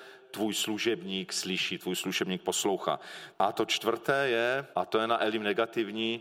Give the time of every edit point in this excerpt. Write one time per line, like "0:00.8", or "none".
0:03.3
0:04.7